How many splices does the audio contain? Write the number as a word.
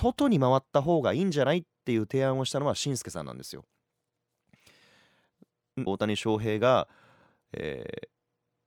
one